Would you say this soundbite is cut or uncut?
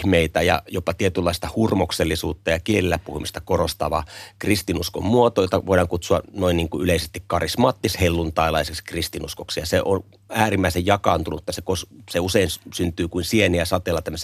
uncut